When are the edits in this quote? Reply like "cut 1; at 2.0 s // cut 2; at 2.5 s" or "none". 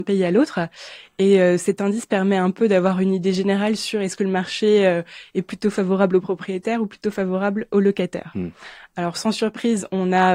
none